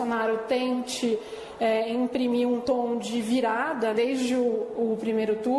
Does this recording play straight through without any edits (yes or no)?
no